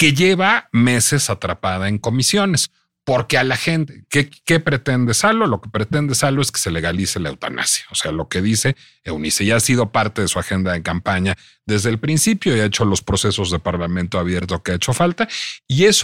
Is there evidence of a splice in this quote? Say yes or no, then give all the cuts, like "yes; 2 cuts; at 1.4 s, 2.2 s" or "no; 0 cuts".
no; 0 cuts